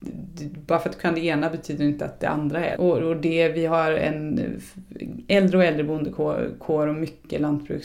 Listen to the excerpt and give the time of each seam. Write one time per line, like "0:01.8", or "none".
0:02.8